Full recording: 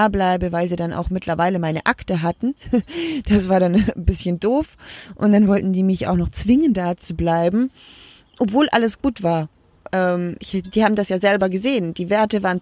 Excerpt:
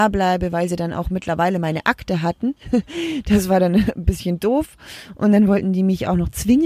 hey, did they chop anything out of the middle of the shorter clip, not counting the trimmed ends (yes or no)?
no